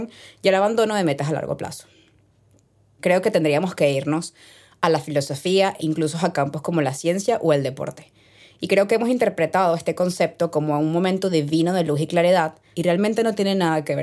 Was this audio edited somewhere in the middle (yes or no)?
yes